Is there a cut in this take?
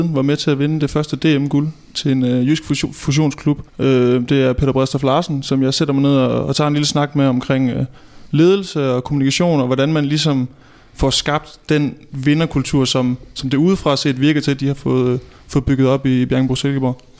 yes; 1 cut; at 3.7 s

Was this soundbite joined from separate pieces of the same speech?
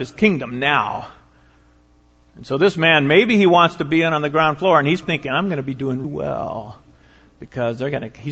yes; 2 cuts; at 5.0 s, 6.0 s

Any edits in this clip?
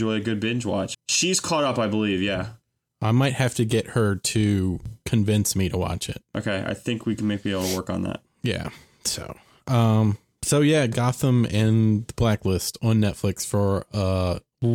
yes; 1 cut; at 0.9 s

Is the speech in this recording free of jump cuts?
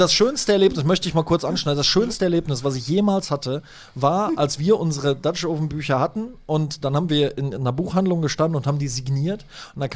yes; 0 cuts

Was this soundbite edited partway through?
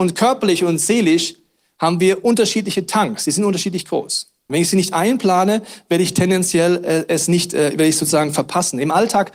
yes; 1 cut; at 4.5 s

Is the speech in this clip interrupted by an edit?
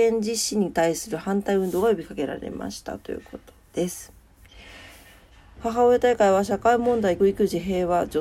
yes; 2 cuts; at 5.6 s, 7.2 s

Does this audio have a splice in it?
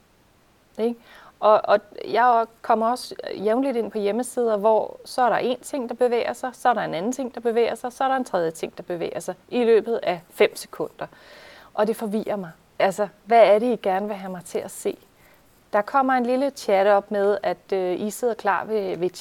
no; 0 cuts

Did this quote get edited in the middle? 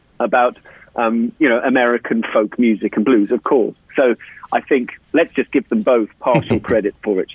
no; 0 cuts

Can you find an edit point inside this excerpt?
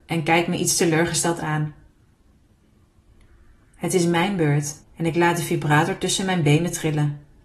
yes; 1 cut; at 4.8 s

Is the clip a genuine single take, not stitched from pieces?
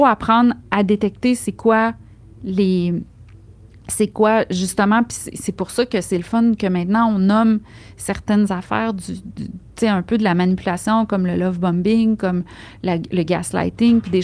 yes; 0 cuts

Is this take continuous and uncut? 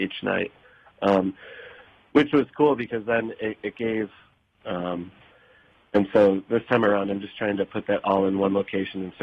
no; 1 cut; at 4.6 s

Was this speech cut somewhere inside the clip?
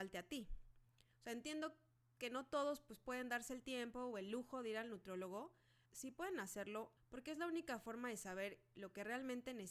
yes; 2 cuts; at 5.9 s, 7.0 s

